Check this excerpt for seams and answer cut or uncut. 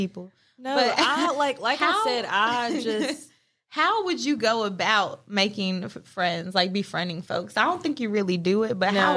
uncut